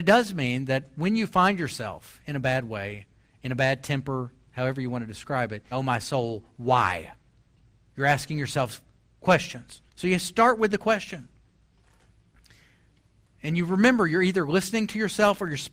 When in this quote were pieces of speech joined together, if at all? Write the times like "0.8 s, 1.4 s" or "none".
5.7 s, 9.9 s